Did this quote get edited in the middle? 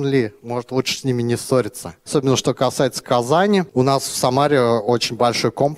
no; 0 cuts

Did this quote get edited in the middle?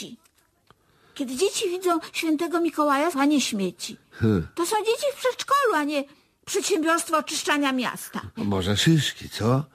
yes; 2 cuts; at 3.1 s, 8.4 s

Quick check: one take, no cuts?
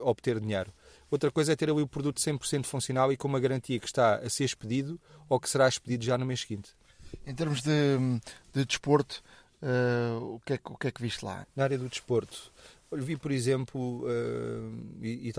no; 1 cut; at 11.4 s

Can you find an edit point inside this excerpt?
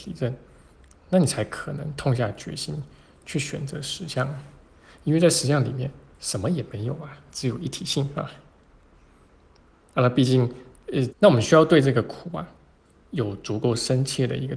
yes; 1 cut; at 11.1 s

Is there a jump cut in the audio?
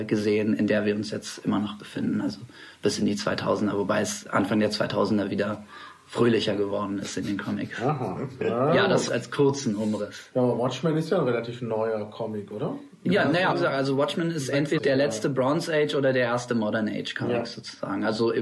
yes; 3 cuts; at 9.1 s, 13.5 s, 14.8 s

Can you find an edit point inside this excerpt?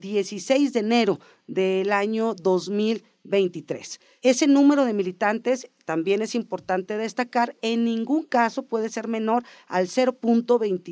yes; 1 cut; at 4.2 s

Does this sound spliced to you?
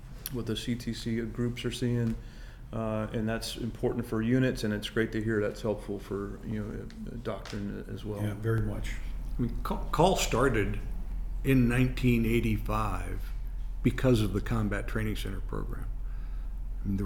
no; 0 cuts

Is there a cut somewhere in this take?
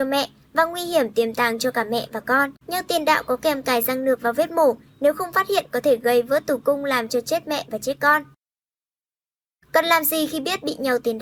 yes; 2 cuts; at 2.6 s, 9.6 s

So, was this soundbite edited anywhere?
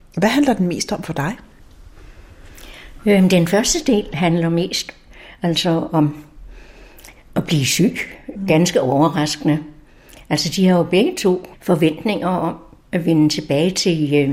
yes; 1 cut; at 11.5 s

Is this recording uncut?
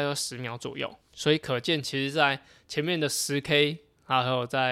yes; 0 cuts

